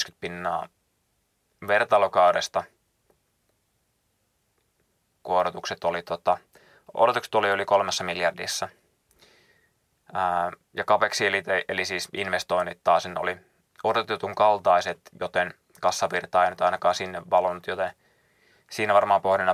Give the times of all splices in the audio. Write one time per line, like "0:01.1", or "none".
none